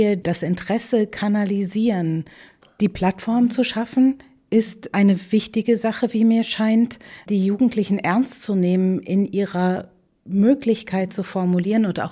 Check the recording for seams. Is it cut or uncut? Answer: uncut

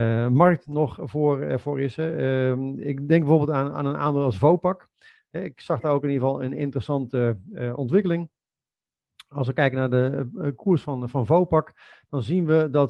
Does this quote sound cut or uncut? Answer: uncut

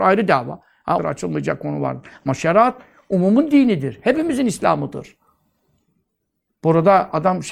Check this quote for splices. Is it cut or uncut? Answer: cut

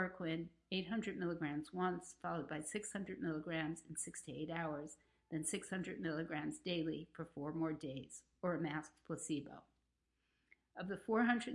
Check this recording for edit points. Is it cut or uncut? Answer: uncut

